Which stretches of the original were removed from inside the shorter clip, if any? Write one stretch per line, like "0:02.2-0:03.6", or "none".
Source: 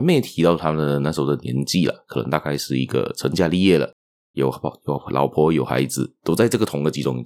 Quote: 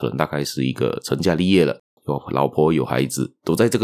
0:04.1-0:04.8